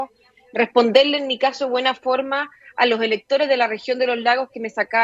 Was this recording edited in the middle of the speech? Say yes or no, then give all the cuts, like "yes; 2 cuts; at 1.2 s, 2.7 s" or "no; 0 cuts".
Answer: no; 0 cuts